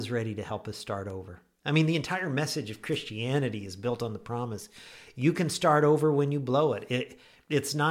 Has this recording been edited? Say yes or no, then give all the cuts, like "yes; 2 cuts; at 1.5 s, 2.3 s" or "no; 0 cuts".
no; 0 cuts